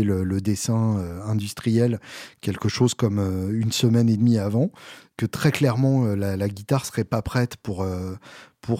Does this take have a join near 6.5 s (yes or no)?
no